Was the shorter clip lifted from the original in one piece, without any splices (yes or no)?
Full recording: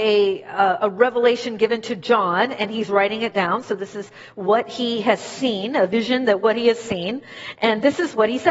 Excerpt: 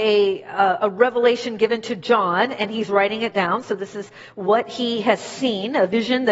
yes